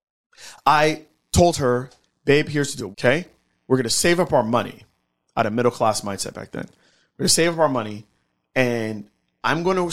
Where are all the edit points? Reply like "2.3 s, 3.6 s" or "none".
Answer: 2.9 s